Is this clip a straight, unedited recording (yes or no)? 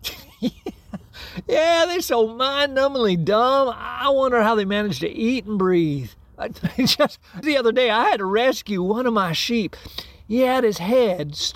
no